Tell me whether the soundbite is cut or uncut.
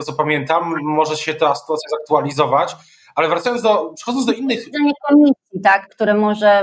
uncut